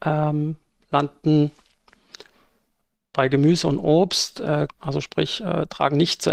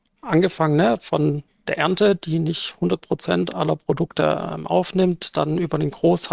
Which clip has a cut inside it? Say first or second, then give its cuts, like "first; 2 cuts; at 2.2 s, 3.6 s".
first; 1 cut; at 4.7 s